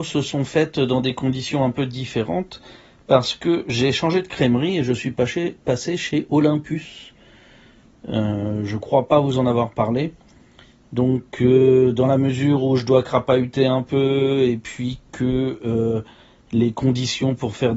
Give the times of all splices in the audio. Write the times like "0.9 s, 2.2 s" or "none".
none